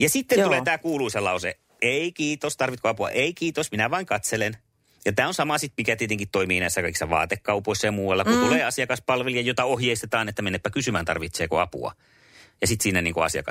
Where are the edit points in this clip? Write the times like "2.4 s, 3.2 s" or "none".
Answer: none